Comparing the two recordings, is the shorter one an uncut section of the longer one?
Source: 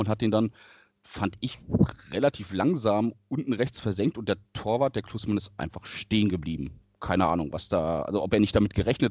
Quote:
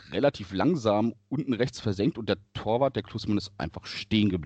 yes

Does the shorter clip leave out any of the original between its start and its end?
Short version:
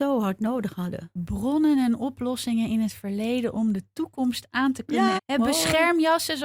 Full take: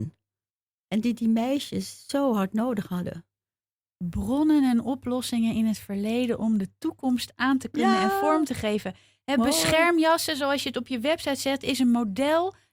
yes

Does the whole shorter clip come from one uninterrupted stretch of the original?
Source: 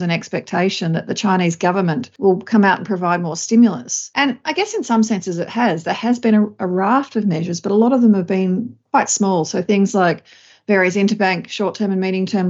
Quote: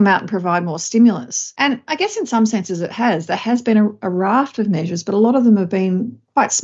yes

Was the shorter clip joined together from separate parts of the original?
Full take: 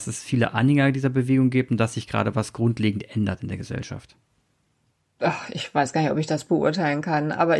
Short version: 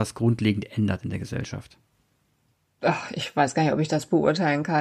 no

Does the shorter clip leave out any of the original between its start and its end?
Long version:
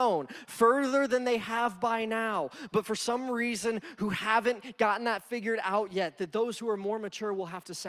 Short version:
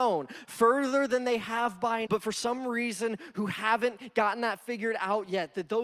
yes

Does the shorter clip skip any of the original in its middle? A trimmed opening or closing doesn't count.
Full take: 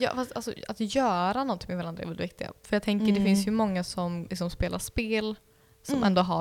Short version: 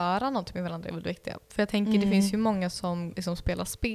no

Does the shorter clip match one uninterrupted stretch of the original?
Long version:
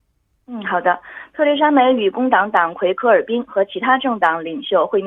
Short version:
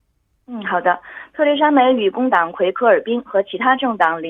no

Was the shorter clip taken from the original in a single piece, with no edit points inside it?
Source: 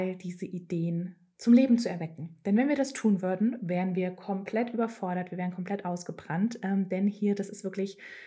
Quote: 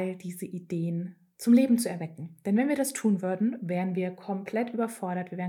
yes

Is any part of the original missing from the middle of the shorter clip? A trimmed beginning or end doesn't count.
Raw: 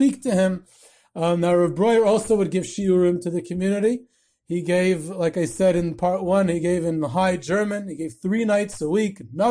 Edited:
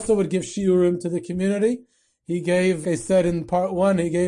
yes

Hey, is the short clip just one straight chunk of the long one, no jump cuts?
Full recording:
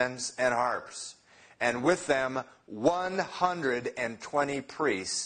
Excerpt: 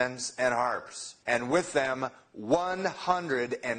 no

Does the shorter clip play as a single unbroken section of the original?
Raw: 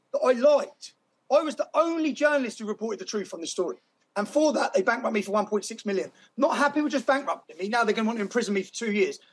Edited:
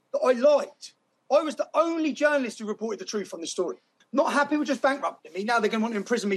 no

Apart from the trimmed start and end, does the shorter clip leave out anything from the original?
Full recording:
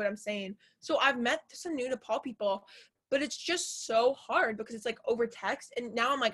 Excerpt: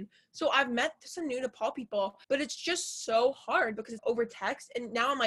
yes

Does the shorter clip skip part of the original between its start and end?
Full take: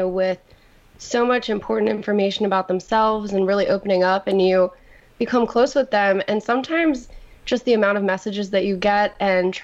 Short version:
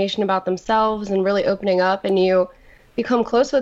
no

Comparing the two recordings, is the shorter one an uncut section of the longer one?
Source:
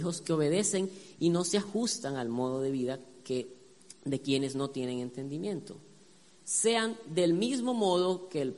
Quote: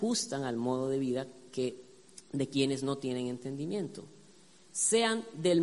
yes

